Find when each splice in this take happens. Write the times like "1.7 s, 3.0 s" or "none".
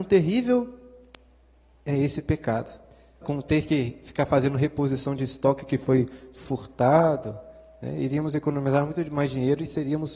3.2 s